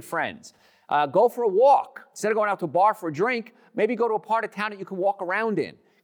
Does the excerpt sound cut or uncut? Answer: uncut